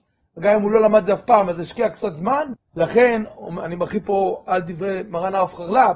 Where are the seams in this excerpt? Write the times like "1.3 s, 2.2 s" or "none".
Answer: 2.5 s